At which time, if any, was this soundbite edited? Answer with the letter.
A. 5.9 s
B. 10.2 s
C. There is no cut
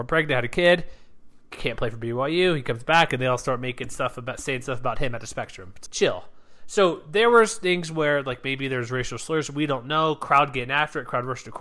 A